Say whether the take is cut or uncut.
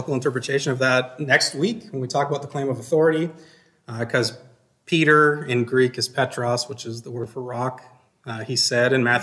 cut